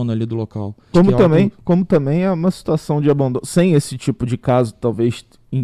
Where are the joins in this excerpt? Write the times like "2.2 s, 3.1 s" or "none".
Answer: 0.9 s